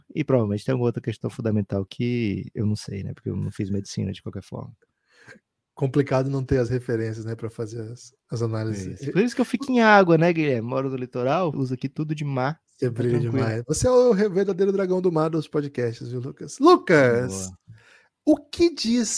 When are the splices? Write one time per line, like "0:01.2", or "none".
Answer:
0:11.5